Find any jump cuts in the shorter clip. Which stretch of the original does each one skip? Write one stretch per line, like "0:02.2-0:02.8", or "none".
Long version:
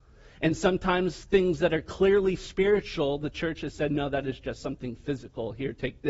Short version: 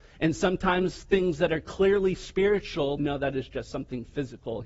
0:03.2-0:03.9